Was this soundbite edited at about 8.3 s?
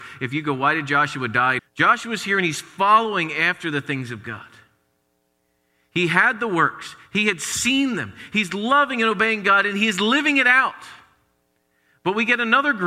no; 1 cut; at 1.6 s

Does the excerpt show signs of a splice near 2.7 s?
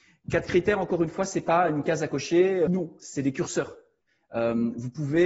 yes; 1 cut; at 2.7 s

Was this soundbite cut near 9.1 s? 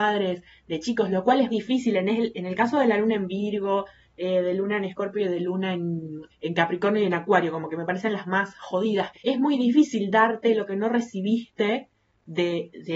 yes; 2 cuts; at 1.5 s, 9.1 s

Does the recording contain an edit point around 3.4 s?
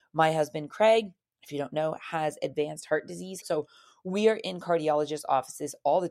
yes; 1 cut; at 3.4 s

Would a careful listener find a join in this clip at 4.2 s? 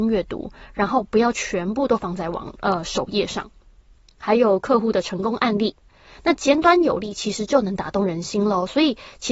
yes; 1 cut; at 4.2 s

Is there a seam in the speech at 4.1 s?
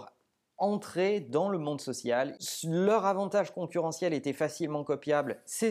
no; 1 cut; at 2.4 s

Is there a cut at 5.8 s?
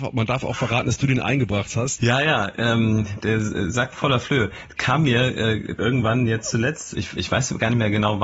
yes; 3 cuts; at 2.0 s, 5.8 s, 6.9 s

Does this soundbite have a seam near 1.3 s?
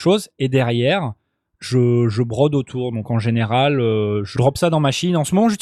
no; 1 cut; at 4.4 s

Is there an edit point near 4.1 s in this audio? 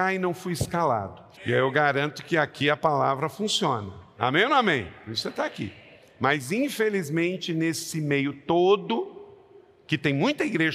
no; 1 cut; at 1.4 s

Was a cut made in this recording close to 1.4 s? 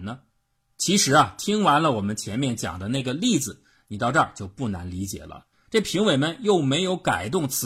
no; 1 cut; at 5.5 s

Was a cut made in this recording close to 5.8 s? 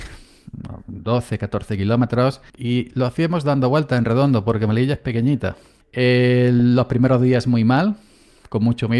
yes; 2 cuts; at 2.5 s, 5.8 s

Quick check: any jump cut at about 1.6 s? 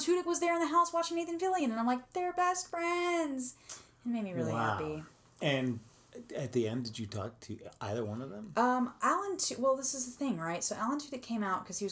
no; 0 cuts

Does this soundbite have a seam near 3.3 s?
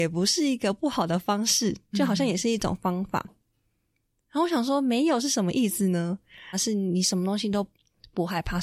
yes; 2 cuts; at 3.3 s, 6.5 s

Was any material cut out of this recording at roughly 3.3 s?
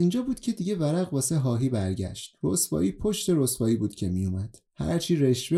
no; 1 cut; at 4.7 s

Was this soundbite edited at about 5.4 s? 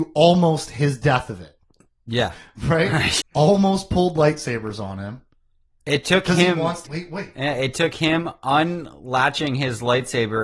no; 2 cuts; at 3.2 s, 6.8 s

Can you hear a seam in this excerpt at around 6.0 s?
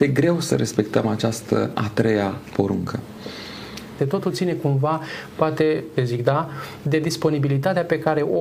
yes; 2 cuts; at 4.0 s, 6.0 s

